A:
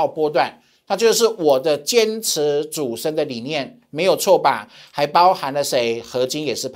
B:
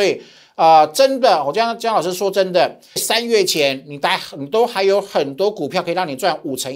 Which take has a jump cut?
B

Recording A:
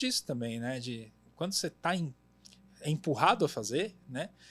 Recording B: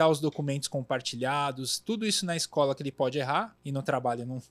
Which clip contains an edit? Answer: B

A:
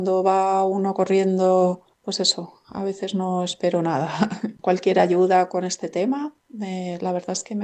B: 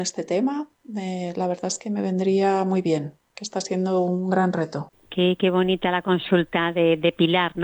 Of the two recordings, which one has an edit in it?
B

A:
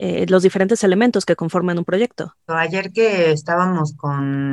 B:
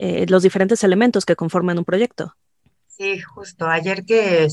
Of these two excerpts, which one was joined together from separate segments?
A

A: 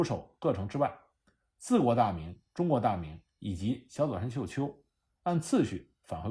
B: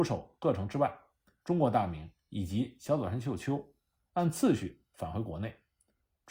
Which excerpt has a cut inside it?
B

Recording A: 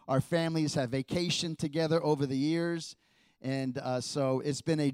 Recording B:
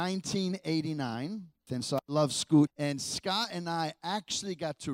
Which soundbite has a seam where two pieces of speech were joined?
B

